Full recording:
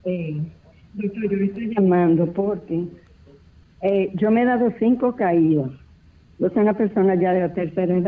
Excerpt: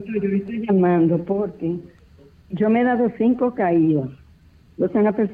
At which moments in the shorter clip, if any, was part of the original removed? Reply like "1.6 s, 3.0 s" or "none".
2.5 s